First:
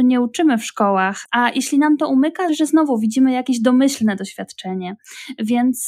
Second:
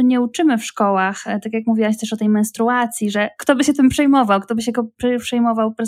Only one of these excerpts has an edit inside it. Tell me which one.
first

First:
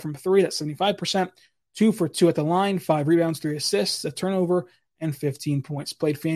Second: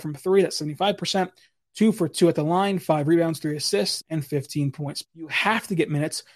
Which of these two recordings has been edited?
second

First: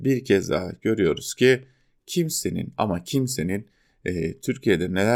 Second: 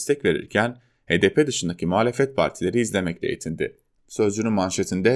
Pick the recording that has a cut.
second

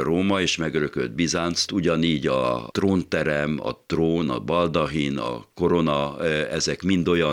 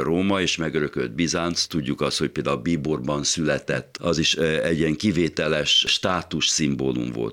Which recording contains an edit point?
first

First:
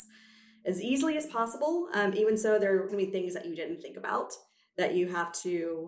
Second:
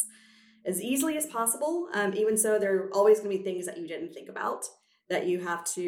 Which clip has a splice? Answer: first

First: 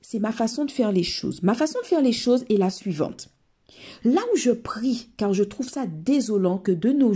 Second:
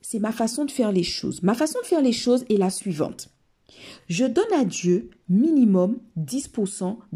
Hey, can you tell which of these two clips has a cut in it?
first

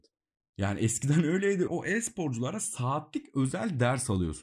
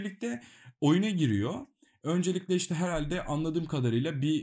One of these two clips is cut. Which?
first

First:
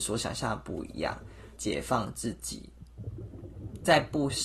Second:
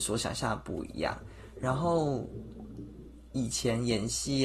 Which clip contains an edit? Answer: first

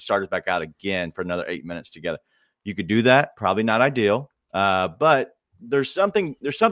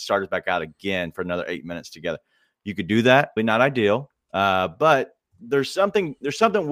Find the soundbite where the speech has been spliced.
second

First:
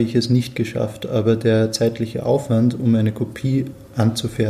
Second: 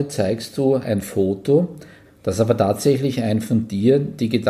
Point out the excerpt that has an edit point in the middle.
second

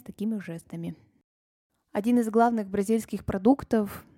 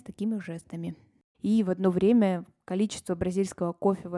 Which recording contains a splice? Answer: second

